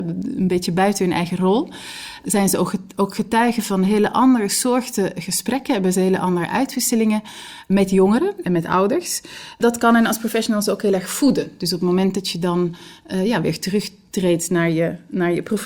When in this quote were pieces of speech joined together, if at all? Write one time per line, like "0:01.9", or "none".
none